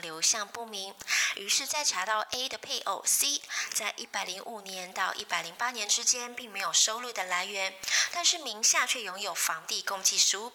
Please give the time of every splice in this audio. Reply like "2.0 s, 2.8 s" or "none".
none